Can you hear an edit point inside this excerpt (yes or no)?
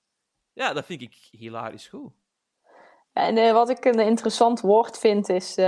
no